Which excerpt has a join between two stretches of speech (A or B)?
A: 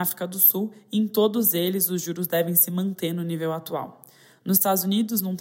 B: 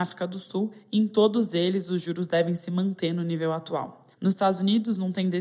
B